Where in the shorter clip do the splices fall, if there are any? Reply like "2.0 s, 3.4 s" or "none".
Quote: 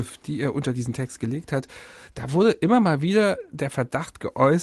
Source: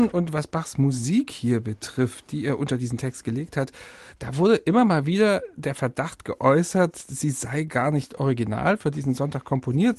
none